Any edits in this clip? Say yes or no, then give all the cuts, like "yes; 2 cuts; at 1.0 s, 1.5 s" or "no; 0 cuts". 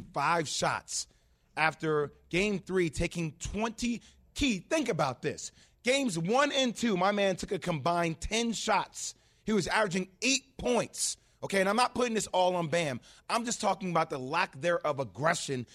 no; 0 cuts